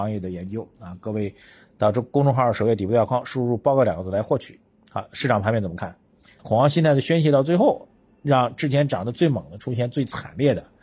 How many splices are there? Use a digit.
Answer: 1